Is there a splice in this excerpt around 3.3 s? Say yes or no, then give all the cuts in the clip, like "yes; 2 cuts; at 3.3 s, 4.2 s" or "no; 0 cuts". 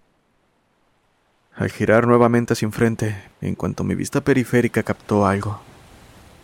yes; 1 cut; at 3.3 s